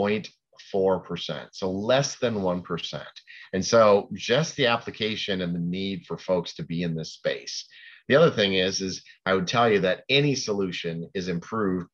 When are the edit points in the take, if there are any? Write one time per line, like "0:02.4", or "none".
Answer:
none